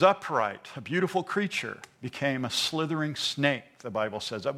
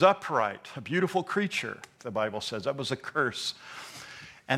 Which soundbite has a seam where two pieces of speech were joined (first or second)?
second